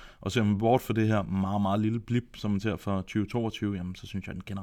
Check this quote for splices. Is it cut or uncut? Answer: uncut